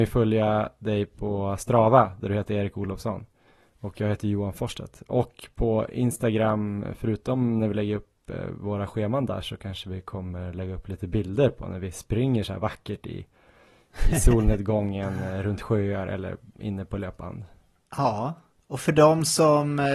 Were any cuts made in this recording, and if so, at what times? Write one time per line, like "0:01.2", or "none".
none